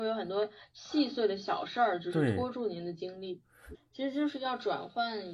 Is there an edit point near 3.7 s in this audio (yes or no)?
yes